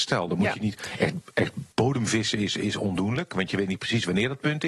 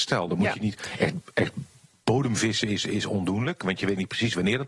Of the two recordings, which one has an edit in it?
first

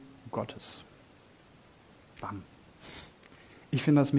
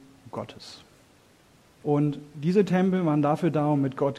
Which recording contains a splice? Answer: second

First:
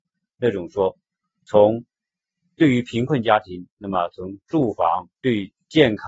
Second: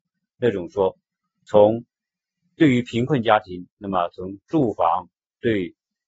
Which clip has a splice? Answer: first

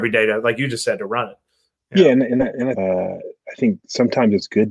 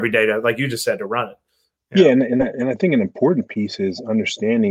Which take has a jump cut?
first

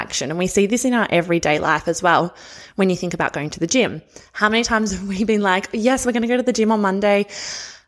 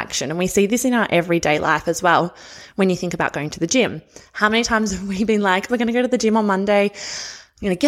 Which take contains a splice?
second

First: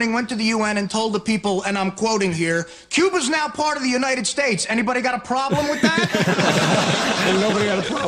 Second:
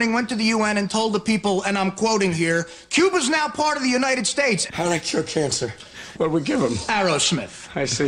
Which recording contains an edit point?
second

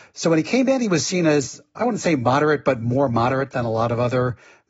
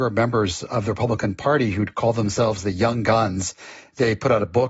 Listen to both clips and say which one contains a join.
first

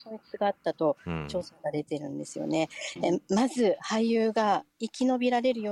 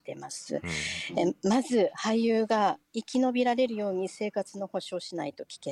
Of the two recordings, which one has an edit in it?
first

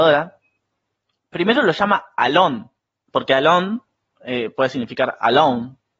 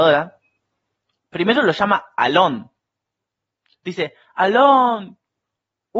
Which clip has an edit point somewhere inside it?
first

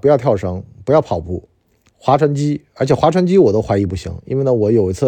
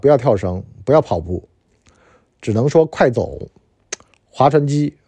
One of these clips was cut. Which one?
first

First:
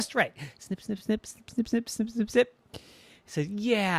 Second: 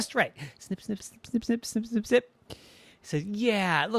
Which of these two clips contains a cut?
second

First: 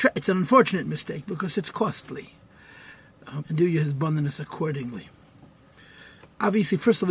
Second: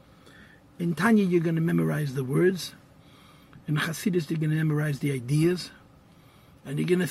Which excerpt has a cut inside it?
first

